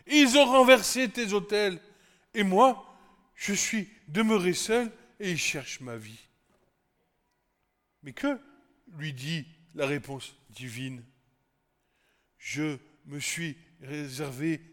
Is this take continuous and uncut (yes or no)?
yes